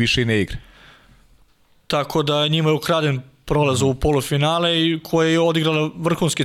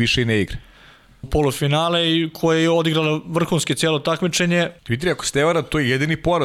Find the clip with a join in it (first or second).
second